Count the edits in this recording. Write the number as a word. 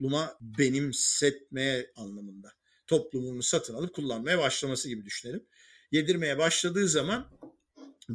zero